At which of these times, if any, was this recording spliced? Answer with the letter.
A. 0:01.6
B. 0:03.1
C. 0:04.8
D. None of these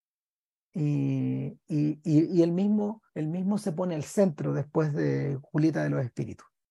B